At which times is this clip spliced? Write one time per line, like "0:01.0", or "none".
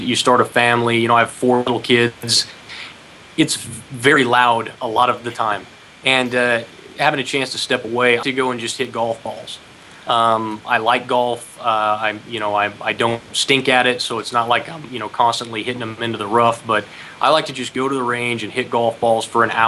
0:08.2